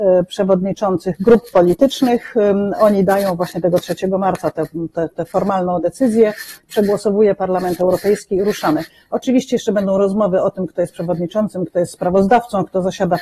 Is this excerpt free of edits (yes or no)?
yes